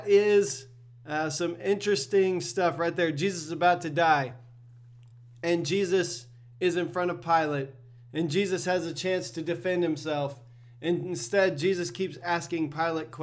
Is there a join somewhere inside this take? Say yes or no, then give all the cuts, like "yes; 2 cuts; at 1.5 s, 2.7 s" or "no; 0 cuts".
no; 0 cuts